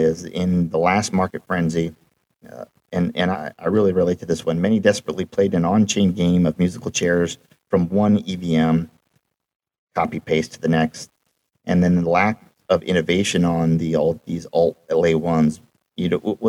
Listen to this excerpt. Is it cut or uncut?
cut